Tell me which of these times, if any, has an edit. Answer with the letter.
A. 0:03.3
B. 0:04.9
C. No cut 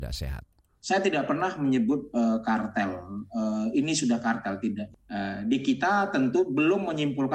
C